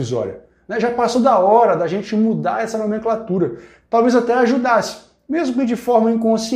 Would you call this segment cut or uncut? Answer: uncut